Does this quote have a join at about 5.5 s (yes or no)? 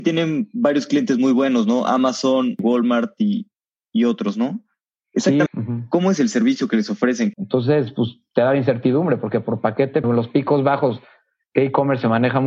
yes